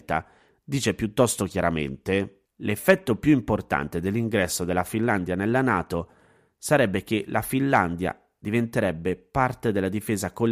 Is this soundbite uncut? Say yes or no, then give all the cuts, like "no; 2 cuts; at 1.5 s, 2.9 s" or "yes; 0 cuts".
no; 1 cut; at 2.5 s